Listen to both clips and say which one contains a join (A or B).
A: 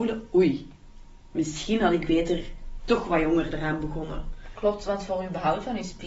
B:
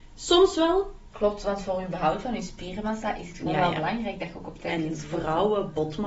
B